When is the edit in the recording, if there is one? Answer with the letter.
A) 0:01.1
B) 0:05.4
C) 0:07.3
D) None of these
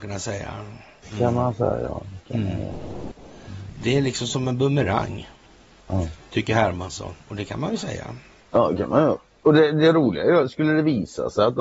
D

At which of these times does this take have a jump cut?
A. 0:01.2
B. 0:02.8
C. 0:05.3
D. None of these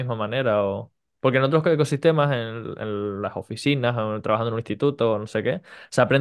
A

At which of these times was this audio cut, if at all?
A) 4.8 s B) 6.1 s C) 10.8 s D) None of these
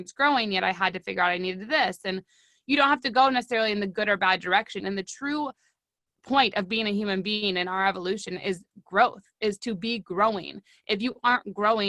A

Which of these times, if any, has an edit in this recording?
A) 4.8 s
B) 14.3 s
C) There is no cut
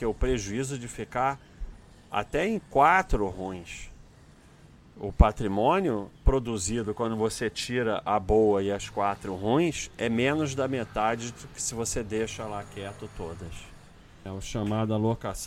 B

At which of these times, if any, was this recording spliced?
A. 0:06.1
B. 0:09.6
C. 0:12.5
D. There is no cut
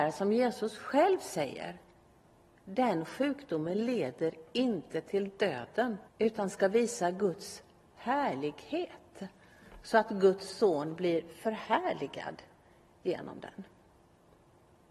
A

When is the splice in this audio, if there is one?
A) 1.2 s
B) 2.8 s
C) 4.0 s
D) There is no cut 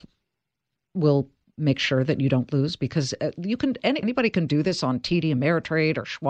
C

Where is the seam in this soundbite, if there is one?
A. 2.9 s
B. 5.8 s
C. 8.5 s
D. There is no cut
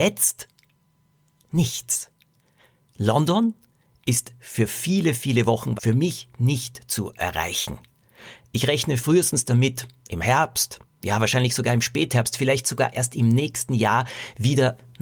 B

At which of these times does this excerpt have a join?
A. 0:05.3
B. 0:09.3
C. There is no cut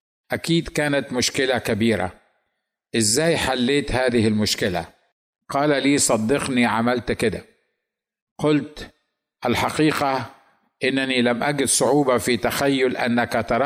A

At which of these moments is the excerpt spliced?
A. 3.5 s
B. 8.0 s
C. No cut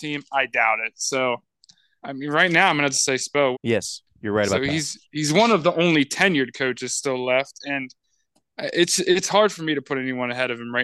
A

